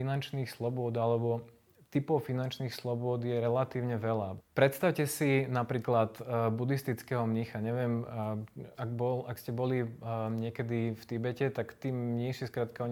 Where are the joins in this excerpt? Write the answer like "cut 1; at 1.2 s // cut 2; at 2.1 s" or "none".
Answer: cut 1; at 8.7 s